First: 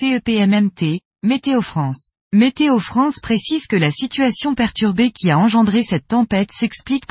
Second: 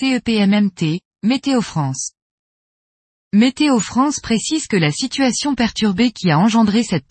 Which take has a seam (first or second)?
first